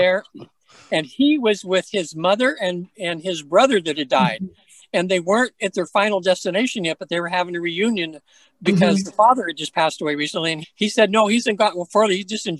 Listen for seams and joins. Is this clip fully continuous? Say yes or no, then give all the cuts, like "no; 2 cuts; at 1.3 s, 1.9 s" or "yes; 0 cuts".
no; 1 cut; at 10.6 s